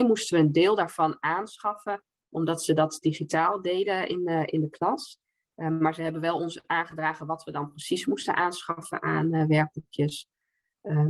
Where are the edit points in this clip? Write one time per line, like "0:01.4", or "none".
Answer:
none